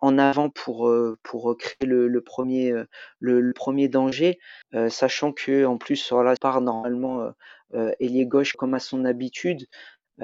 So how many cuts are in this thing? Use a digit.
3